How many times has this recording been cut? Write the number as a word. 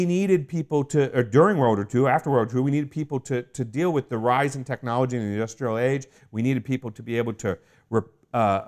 zero